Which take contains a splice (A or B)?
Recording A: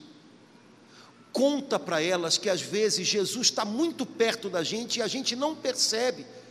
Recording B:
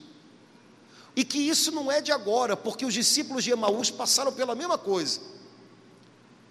B